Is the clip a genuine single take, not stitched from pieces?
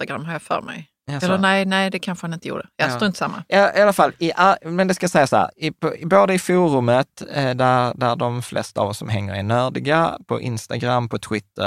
yes; 0 cuts

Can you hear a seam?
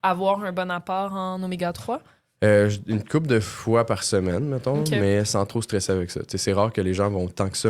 no; 0 cuts

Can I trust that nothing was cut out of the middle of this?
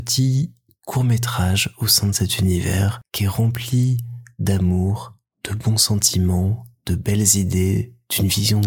yes; 0 cuts

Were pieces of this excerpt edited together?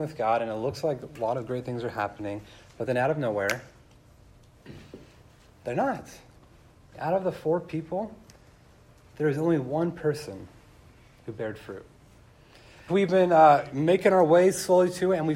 yes; 2 cuts; at 6.9 s, 12.9 s

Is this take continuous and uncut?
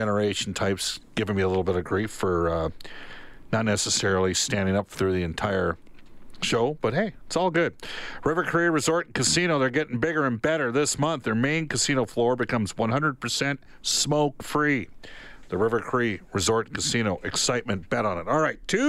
yes; 0 cuts

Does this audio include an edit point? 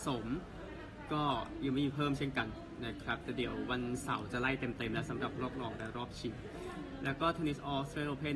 no; 0 cuts

